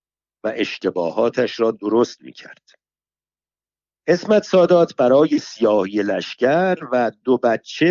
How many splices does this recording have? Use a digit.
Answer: 0